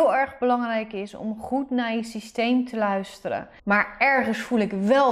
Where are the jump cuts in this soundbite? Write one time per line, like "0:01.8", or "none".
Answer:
0:03.6